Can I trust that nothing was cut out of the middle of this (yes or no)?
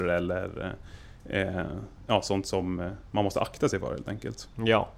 yes